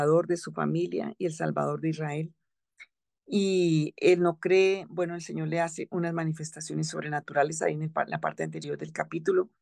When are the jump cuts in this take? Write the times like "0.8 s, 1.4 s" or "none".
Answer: none